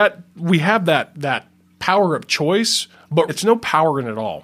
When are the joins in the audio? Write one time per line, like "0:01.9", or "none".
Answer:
0:03.3